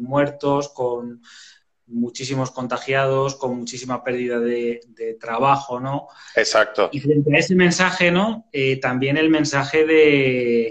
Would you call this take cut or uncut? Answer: uncut